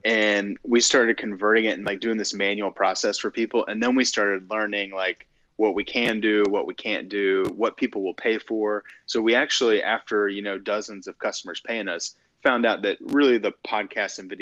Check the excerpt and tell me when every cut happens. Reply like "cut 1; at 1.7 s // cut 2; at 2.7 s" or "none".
none